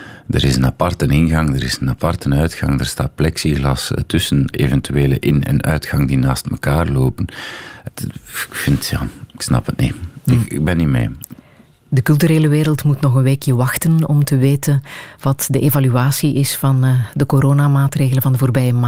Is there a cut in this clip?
yes; 2 cuts; at 4.5 s, 7.9 s

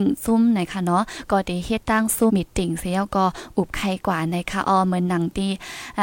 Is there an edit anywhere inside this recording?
yes; 1 cut; at 2.3 s

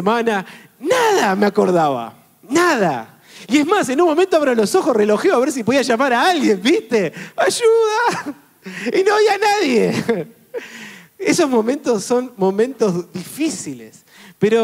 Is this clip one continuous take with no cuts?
yes; 0 cuts

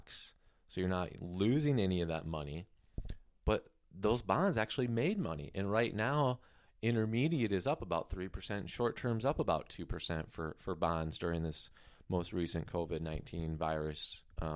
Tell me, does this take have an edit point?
no; 0 cuts

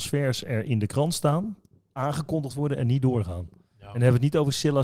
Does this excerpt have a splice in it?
no; 0 cuts

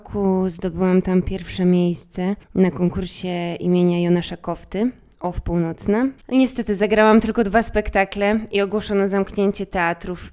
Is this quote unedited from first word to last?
no; 1 cut; at 6.2 s

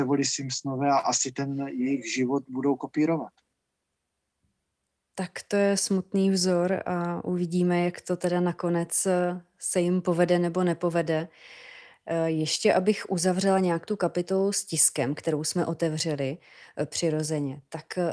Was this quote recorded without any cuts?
yes; 0 cuts

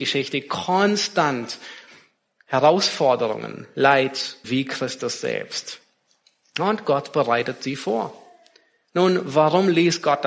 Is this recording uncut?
no; 1 cut; at 4.4 s

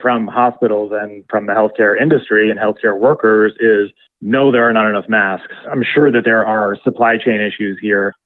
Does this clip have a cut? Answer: no; 0 cuts

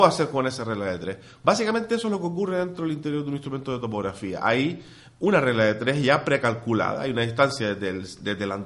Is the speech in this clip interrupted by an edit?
no; 0 cuts

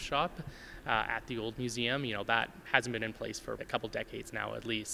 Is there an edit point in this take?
yes; 1 cut; at 3.6 s

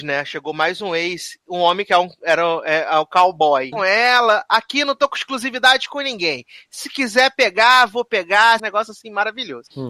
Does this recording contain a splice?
yes; 2 cuts; at 3.7 s, 8.6 s

